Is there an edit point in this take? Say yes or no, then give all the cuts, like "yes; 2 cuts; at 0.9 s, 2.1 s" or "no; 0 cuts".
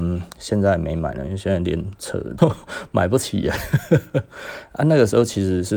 yes; 1 cut; at 2.4 s